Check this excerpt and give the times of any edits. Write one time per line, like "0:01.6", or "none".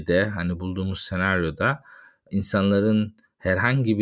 none

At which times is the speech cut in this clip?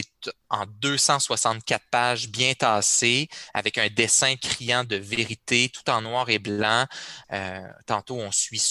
0:07.2

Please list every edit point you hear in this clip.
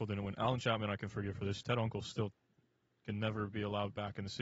none

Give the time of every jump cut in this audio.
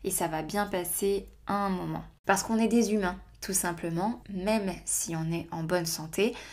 0:02.2
0:04.2

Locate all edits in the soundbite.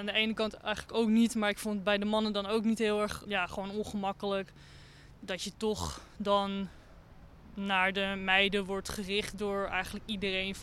0:05.2

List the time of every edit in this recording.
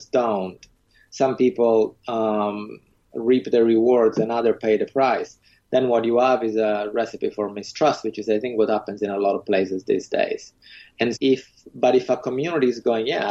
0:11.2

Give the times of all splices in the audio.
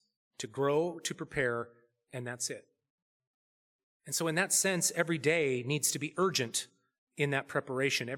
none

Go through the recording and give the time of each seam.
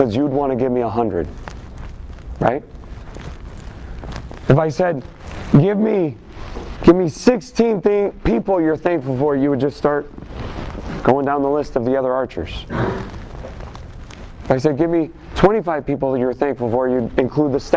0:06.8

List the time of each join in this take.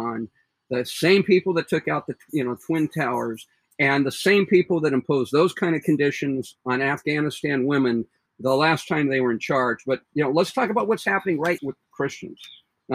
0:11.6

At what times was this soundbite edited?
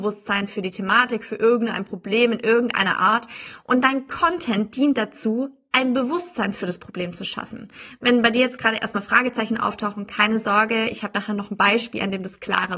none

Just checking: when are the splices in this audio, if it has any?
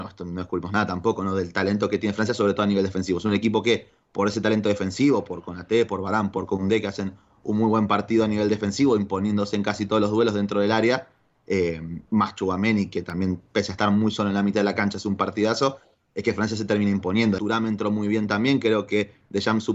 0:17.4

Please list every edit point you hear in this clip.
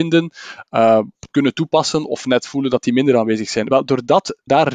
none

